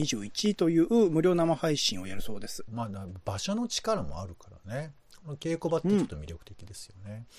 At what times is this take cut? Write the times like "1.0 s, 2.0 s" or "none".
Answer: 2.7 s